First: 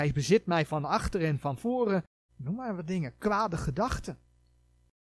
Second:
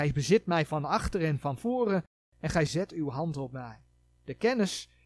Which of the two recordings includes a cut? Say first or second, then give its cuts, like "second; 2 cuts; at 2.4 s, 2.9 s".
first; 1 cut; at 2.3 s